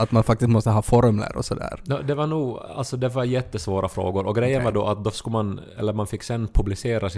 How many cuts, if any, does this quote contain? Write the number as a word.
zero